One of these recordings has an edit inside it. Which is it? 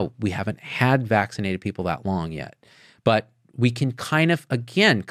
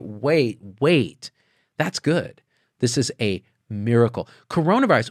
second; 1 cut; at 2.6 s

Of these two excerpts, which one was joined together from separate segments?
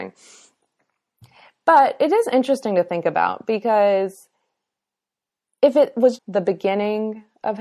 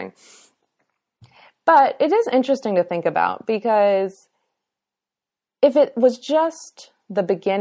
first; 1 cut; at 6.2 s

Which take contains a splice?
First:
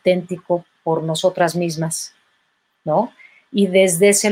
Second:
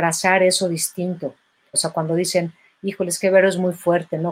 second; 1 cut; at 1.7 s

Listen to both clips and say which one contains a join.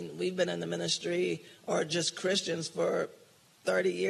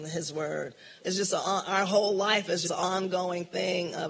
second; 2 cuts; at 1.0 s, 2.6 s

